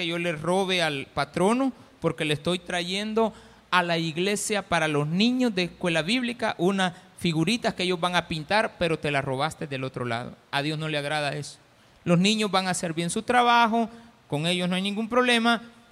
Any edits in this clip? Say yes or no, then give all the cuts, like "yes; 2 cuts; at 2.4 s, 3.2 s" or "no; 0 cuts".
no; 0 cuts